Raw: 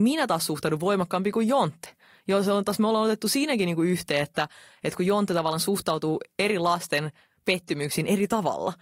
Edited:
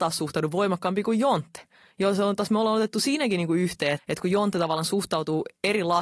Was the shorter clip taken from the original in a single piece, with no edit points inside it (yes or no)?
no